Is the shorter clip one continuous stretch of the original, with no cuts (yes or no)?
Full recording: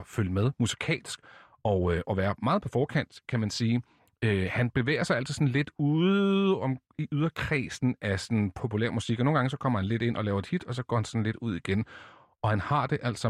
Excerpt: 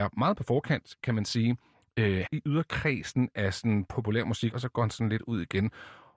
no